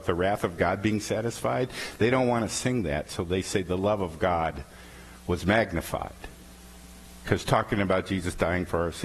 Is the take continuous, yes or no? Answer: yes